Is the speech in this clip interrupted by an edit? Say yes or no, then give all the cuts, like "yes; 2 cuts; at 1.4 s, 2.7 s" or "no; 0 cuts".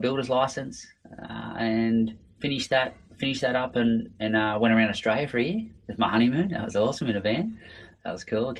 no; 0 cuts